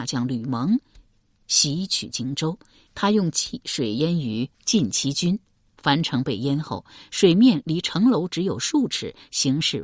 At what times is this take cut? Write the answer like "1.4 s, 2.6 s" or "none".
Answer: 2.9 s